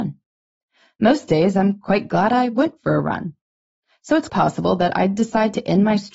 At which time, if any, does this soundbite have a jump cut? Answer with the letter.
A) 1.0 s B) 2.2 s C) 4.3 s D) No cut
C